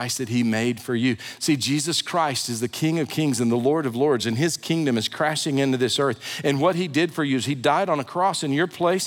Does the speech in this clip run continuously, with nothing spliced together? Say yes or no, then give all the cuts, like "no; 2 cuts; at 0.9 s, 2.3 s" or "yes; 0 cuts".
yes; 0 cuts